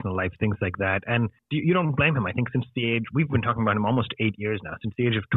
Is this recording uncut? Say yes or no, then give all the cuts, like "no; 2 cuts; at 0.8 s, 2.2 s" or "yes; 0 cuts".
yes; 0 cuts